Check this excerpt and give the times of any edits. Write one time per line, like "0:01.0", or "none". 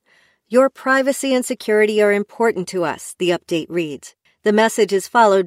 0:04.3